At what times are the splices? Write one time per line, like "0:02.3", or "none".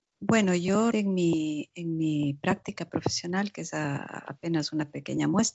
0:00.9